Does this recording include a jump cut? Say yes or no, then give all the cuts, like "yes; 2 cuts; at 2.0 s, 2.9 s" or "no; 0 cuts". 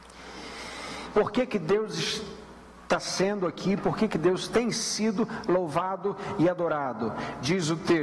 yes; 1 cut; at 1.1 s